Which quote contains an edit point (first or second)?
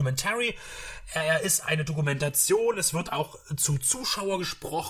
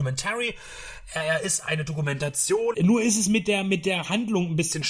second